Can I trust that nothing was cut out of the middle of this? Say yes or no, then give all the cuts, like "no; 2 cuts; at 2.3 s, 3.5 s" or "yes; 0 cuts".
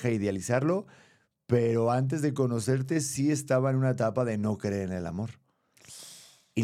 yes; 0 cuts